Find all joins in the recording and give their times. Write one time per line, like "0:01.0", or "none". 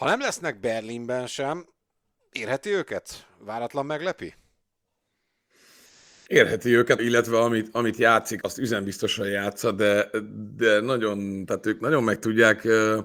0:07.0
0:08.4

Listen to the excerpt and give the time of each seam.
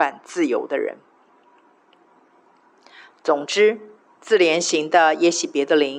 none

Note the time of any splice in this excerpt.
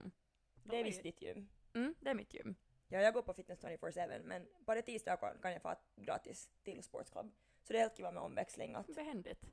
none

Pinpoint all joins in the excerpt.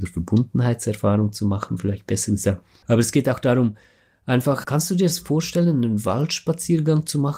0:02.8
0:04.6

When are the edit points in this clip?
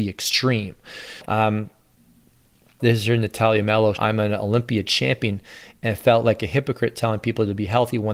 0:01.2
0:03.9

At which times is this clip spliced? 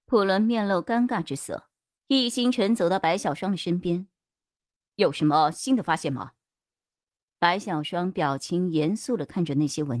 0:02.0

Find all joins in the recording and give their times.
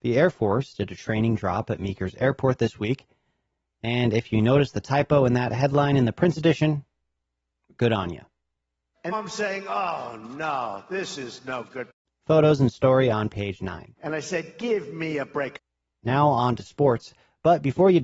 0:09.1

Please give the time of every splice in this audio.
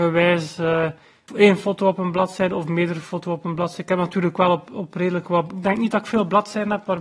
0:01.3

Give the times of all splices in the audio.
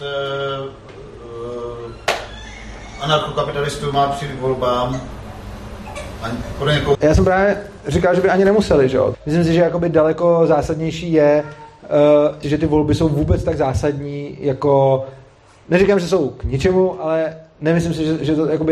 0:06.9
0:09.1
0:12.4

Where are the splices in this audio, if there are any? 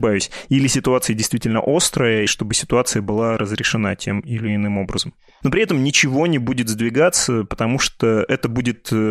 0:02.3
0:05.4

